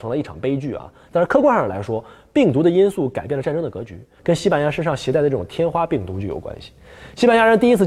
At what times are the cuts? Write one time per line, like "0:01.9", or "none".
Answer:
0:04.2

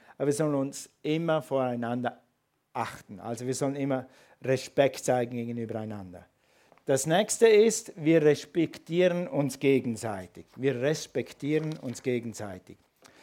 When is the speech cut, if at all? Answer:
0:06.7

